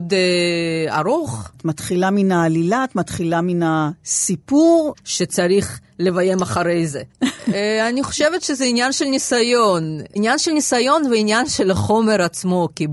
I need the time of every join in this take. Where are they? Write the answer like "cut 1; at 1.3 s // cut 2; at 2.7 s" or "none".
cut 1; at 1.5 s // cut 2; at 4.9 s // cut 3; at 7.1 s